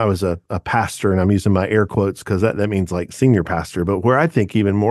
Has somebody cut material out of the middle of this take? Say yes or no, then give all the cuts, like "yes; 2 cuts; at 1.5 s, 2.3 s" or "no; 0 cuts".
no; 0 cuts